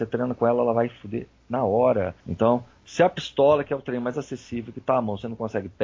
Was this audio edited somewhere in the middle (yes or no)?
yes